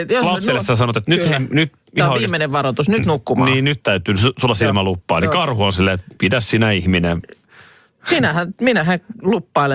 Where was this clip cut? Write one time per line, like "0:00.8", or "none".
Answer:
none